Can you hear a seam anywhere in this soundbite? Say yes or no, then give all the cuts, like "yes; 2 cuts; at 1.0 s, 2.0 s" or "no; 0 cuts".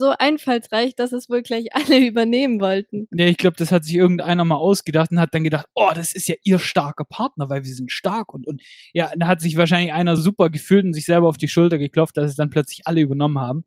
yes; 1 cut; at 10.2 s